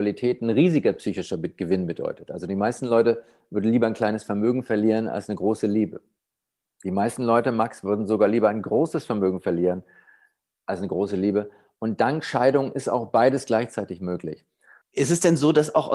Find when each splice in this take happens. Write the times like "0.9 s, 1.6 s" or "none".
none